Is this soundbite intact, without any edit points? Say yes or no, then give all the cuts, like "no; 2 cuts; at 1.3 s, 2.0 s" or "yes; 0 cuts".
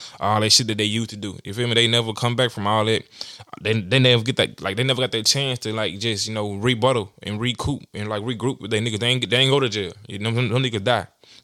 yes; 0 cuts